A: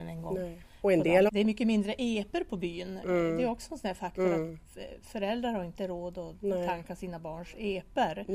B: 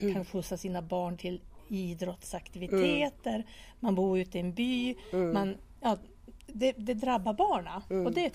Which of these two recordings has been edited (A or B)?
A